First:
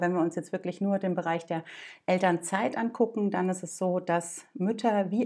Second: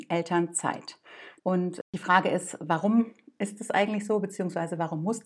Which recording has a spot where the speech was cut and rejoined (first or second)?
second